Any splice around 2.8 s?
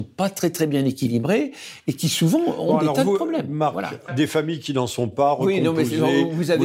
no; 1 cut; at 4.1 s

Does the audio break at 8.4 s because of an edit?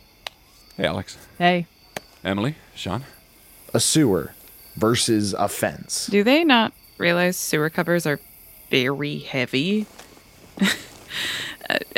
no; 0 cuts

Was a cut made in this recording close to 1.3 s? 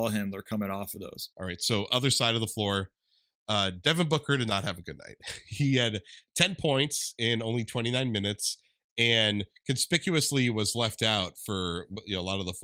yes; 1 cut; at 1.3 s

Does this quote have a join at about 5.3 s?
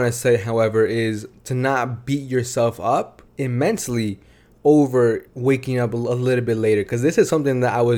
yes; 2 cuts; at 3.3 s, 5.3 s

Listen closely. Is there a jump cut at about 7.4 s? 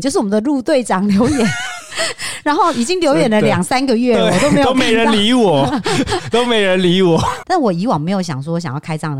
yes; 1 cut; at 7.4 s

